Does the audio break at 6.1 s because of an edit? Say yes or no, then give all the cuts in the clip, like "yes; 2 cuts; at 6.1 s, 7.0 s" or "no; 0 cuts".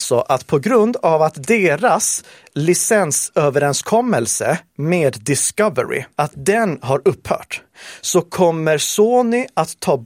yes; 1 cut; at 6.1 s